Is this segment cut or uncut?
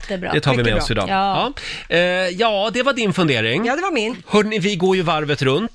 uncut